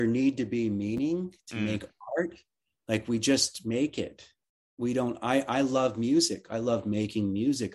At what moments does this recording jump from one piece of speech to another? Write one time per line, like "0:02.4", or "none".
none